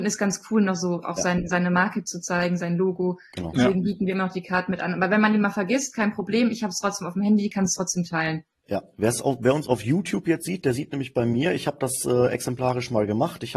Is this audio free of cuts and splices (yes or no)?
yes